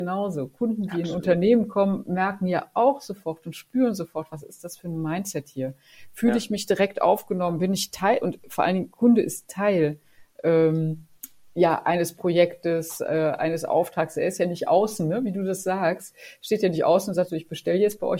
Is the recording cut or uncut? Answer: uncut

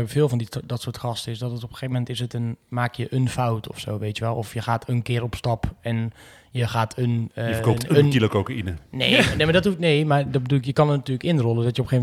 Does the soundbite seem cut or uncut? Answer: uncut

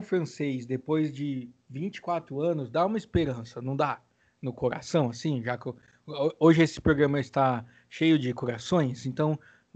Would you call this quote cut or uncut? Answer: uncut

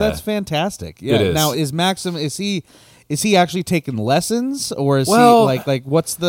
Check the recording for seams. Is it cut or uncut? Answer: cut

